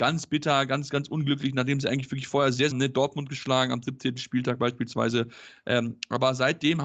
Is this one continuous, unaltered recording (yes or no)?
no